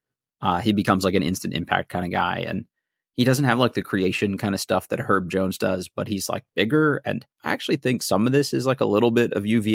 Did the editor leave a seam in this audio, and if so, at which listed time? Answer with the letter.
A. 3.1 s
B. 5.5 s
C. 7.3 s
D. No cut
C